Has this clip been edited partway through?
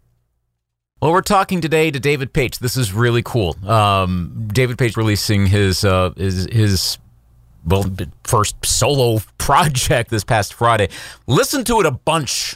yes; 2 cuts; at 4.9 s, 10.1 s

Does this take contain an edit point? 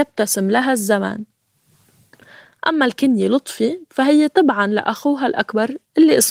no; 0 cuts

